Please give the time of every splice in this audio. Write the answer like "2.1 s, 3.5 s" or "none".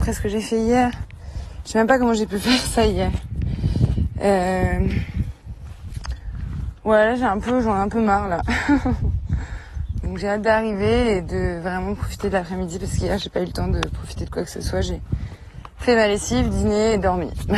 none

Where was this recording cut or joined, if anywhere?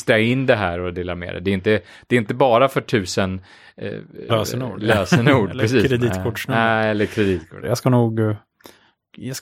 4.3 s, 7.6 s

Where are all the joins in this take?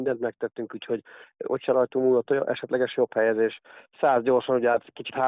none

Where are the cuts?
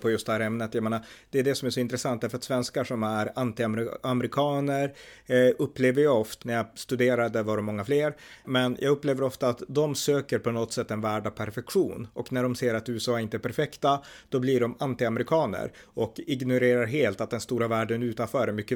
6.4 s, 8.4 s

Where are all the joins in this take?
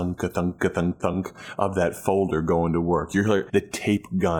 1.0 s, 3.5 s

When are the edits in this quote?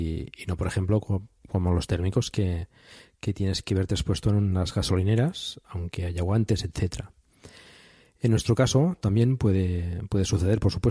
none

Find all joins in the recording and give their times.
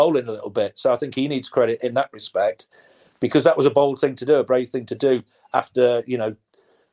1.8 s

